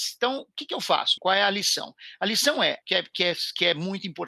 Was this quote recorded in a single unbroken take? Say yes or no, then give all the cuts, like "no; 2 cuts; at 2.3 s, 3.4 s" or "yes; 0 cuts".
no; 2 cuts; at 1.2 s, 2.8 s